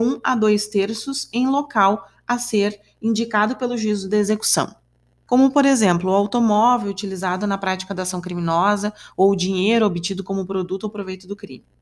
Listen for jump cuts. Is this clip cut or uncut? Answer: cut